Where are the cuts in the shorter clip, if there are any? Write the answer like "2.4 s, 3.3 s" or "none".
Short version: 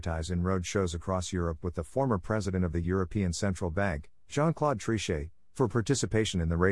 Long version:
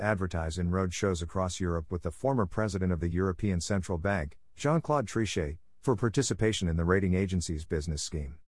none

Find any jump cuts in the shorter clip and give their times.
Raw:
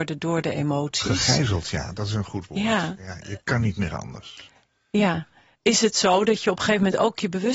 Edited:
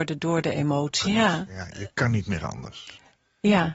1.0 s

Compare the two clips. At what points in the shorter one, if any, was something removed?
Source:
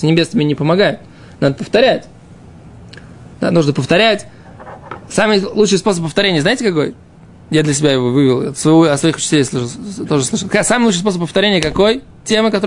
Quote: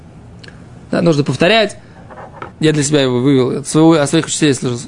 2.5 s

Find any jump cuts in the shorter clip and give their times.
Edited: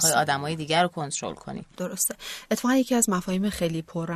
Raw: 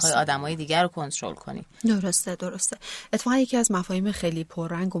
1.8 s

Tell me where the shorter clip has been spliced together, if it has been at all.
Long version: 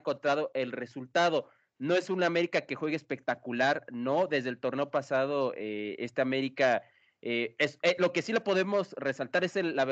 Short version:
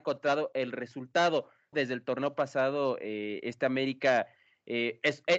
1.7 s

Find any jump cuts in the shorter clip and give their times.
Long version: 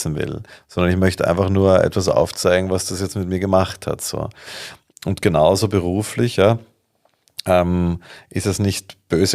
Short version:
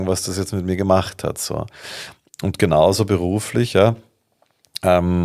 none

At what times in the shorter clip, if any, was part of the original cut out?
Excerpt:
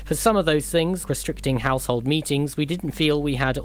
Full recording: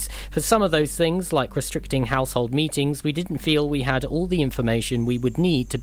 1.0 s

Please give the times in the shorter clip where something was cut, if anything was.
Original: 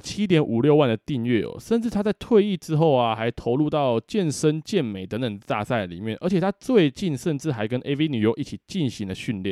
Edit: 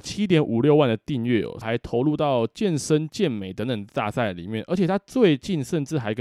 1.6 s

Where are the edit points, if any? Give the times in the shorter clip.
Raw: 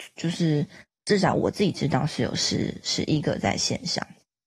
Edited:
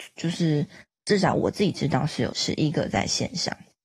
2.3 s

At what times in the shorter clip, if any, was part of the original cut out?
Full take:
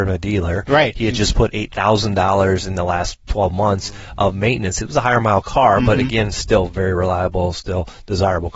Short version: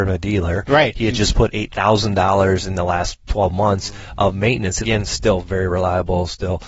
4.8 s

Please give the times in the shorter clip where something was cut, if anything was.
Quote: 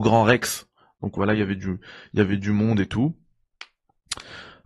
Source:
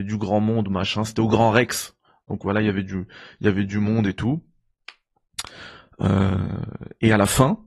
none

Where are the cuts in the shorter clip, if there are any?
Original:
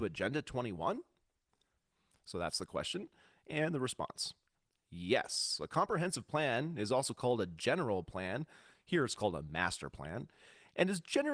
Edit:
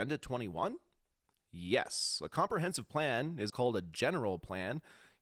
1.3 s, 3.5 s

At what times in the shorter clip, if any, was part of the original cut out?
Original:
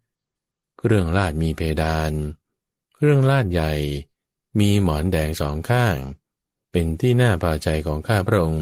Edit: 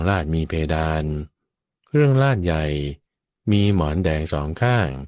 none

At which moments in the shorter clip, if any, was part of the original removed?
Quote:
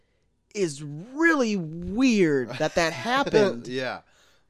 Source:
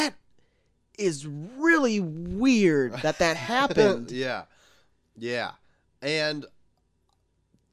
none

